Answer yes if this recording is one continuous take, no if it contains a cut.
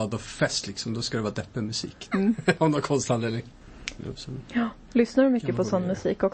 no